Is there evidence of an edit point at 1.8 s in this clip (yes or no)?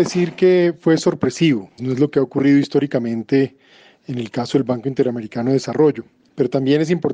yes